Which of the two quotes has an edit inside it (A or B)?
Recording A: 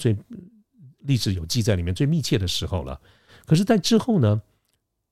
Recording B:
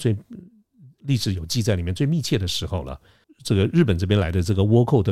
B